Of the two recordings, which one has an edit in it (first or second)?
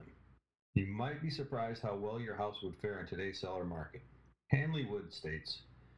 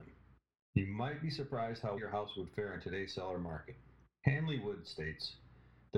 second